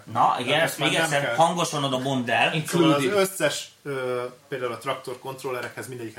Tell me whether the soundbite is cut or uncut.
cut